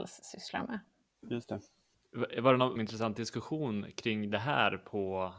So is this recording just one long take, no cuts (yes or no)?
no